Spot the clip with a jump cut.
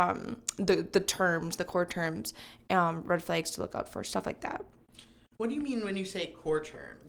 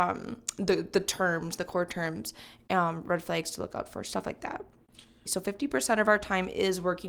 second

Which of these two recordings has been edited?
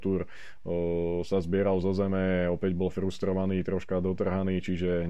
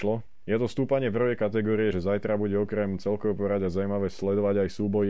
second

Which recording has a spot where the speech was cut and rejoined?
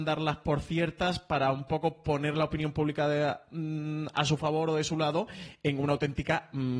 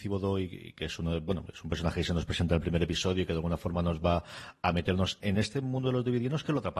second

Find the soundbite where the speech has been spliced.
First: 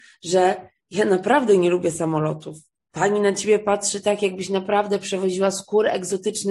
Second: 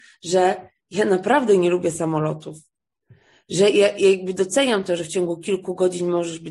first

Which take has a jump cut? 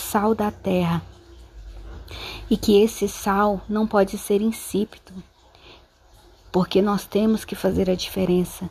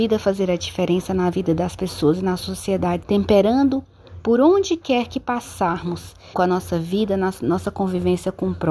second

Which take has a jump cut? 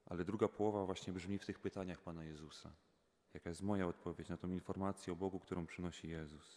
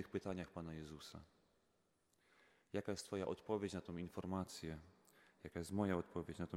first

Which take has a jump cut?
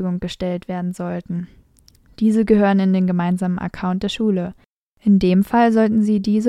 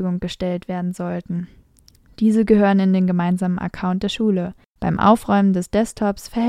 second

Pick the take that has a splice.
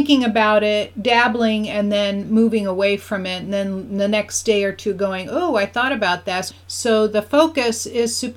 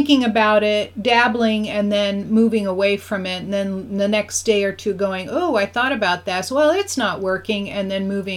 first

